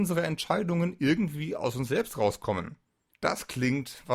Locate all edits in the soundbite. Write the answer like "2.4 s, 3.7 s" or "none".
3.1 s